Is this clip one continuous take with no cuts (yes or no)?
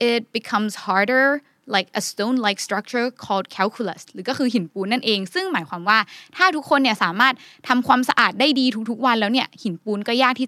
yes